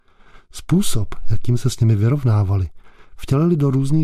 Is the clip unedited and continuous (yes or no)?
yes